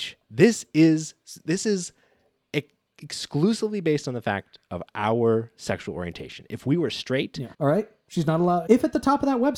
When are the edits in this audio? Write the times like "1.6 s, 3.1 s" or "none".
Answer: 7.5 s, 8.7 s